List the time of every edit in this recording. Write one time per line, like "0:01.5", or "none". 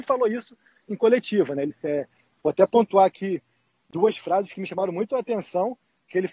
none